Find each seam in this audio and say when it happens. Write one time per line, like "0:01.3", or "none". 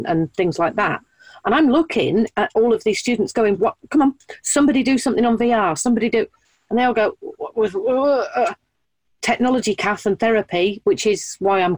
0:05.8